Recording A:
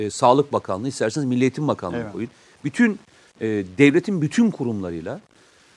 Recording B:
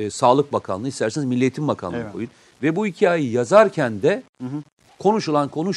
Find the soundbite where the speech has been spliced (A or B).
B